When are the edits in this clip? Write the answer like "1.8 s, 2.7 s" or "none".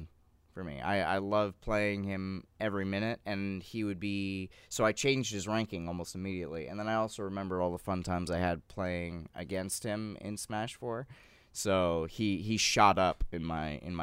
none